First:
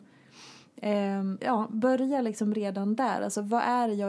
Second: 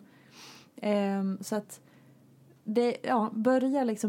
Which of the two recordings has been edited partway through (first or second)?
first